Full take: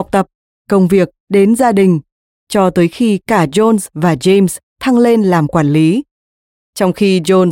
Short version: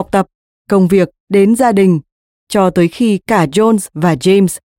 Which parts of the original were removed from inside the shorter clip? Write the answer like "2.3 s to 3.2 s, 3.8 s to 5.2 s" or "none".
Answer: none